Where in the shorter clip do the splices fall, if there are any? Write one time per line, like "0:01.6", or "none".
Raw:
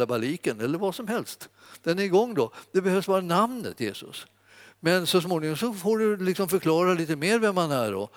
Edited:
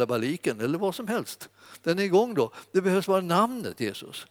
none